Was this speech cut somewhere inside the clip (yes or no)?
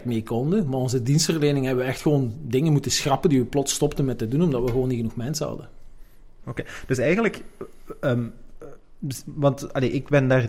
yes